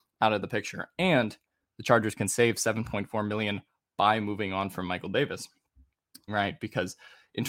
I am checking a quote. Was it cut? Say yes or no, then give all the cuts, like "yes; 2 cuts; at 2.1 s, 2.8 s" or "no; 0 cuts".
yes; 1 cut; at 6.3 s